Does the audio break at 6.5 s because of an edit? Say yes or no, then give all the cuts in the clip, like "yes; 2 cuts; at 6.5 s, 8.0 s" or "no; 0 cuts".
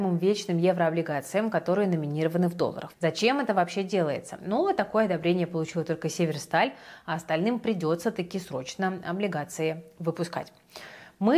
no; 2 cuts; at 2.9 s, 4.4 s